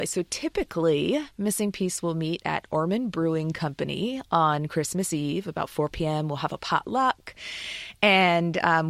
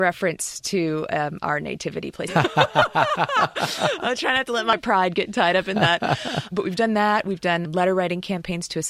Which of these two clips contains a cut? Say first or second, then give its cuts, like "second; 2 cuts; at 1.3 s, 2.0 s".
second; 2 cuts; at 2.3 s, 7.6 s